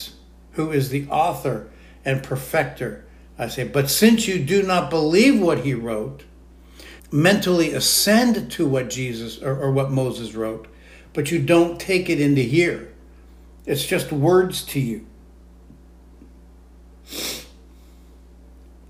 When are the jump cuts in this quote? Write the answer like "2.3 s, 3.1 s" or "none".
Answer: 7.0 s